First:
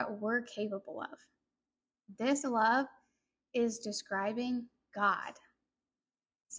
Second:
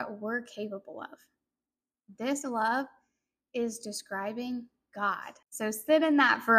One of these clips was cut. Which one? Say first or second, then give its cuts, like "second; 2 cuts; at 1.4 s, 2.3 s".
second; 1 cut; at 5.4 s